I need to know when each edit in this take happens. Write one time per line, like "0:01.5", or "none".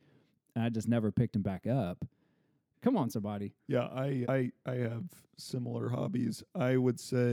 0:02.7
0:04.2